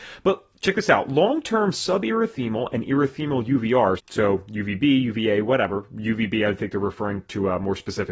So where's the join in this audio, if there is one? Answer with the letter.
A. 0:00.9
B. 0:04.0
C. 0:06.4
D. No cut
B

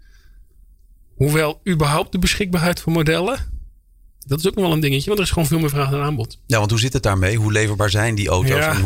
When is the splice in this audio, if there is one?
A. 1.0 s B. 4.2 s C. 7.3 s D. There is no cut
B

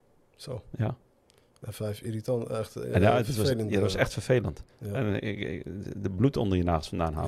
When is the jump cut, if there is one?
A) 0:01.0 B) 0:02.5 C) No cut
C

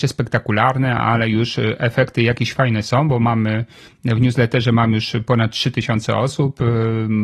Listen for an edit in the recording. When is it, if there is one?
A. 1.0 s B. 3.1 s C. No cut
C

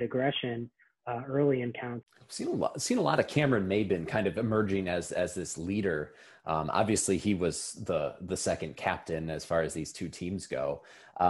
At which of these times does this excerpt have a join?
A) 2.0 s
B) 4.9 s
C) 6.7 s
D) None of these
A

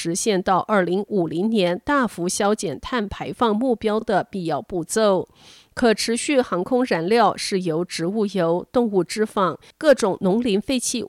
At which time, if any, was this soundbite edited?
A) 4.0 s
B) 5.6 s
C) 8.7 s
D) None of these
D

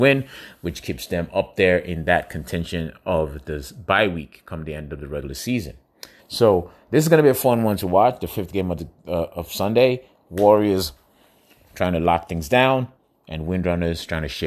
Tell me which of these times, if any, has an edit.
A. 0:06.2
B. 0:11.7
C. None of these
A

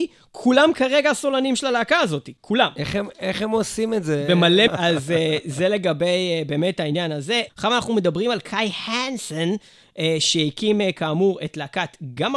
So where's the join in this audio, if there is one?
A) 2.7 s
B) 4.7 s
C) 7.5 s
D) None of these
B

